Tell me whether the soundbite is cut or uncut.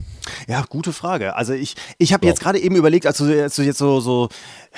uncut